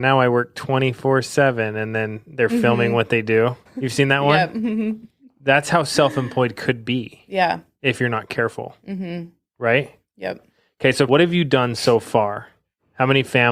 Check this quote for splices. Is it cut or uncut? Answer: cut